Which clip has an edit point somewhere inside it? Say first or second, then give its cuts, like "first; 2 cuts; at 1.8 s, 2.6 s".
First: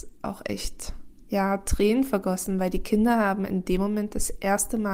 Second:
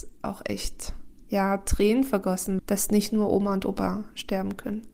second; 1 cut; at 2.6 s